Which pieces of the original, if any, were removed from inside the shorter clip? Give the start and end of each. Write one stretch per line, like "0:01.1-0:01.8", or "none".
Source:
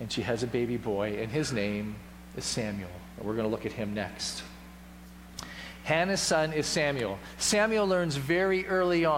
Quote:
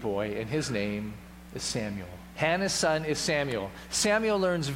0:03.2-0:05.8